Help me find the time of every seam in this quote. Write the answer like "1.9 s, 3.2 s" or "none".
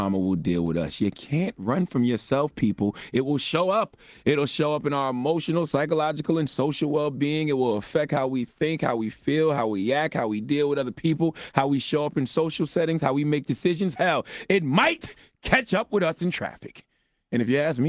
none